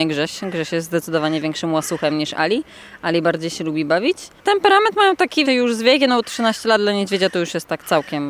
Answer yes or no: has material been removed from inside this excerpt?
yes